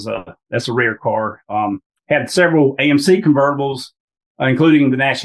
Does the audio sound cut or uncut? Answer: uncut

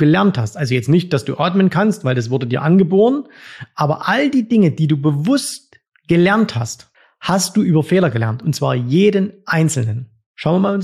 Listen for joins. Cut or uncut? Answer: uncut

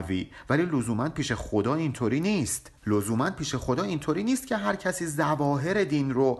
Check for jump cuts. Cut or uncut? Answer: cut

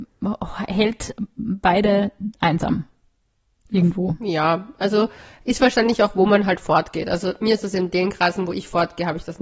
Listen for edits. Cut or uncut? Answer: uncut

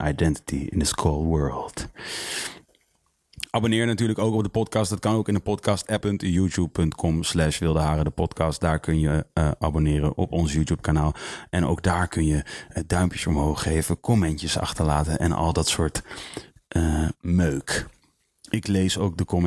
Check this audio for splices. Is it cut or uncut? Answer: cut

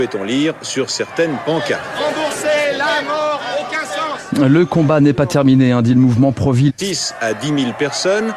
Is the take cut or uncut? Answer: cut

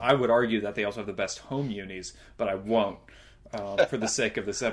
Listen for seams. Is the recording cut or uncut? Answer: uncut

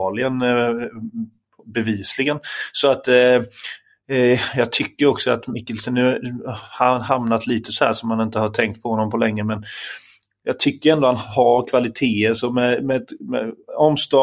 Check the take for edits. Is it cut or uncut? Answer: uncut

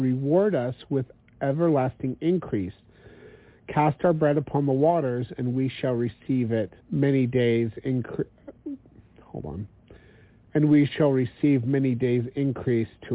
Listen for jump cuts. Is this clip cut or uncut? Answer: cut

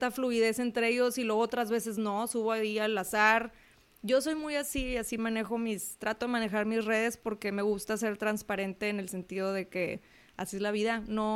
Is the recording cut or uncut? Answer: uncut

